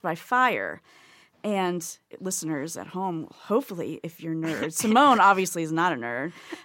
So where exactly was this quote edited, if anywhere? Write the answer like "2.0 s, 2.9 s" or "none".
2.1 s